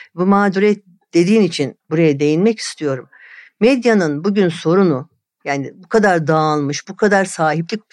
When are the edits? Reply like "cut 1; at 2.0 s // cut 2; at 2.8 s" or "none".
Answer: cut 1; at 6.8 s